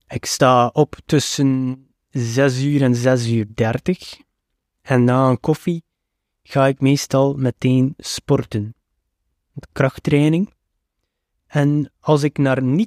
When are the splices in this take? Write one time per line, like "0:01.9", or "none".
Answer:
0:11.3